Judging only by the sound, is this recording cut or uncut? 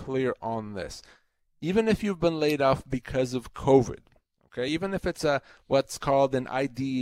uncut